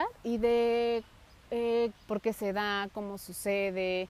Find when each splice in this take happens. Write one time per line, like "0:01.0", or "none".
0:01.9